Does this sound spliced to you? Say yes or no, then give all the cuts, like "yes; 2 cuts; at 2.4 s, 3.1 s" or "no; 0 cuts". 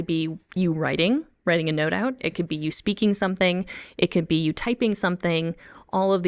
no; 0 cuts